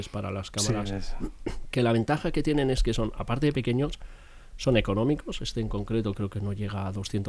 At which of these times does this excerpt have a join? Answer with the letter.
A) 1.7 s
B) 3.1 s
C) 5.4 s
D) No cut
A